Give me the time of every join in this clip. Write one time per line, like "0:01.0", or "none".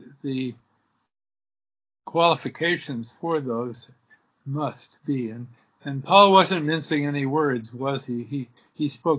none